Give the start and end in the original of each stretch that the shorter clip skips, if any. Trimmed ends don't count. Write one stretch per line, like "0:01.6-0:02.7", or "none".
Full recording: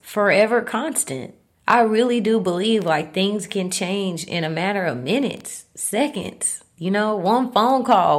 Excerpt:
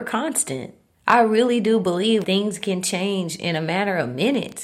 0:02.8-0:03.1